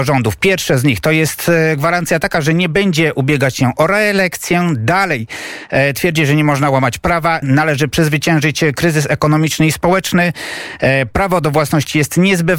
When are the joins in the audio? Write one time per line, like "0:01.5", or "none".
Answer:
0:07.4